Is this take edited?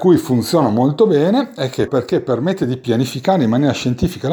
yes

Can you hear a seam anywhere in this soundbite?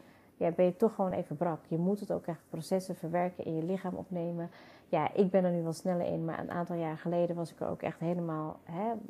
no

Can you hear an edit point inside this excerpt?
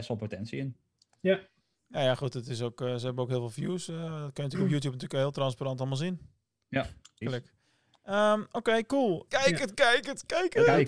yes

